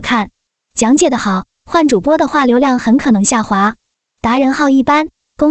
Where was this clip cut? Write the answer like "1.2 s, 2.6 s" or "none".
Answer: none